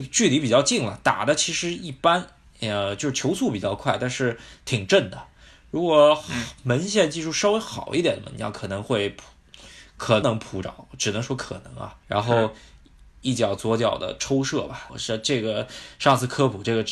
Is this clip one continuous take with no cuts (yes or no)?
no